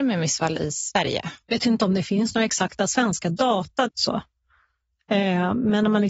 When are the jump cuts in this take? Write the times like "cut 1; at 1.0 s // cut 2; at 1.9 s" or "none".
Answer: cut 1; at 1.4 s // cut 2; at 3.9 s